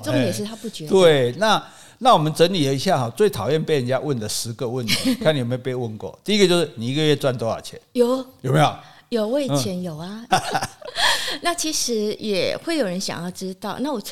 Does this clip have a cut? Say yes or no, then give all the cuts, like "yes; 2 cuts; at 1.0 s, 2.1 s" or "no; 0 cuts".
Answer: yes; 1 cut; at 10.3 s